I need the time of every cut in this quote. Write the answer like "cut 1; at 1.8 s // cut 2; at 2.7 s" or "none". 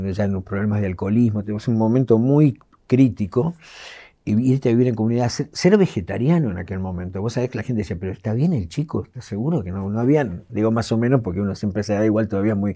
cut 1; at 4.2 s // cut 2; at 10.5 s